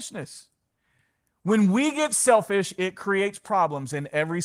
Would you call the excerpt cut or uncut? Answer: uncut